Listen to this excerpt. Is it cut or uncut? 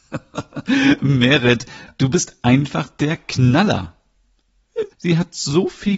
cut